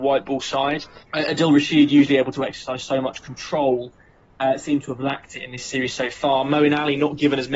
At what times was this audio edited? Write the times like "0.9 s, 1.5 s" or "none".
1.0 s